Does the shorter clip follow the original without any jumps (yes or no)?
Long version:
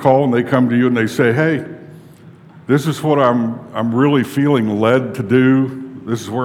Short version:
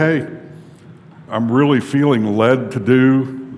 no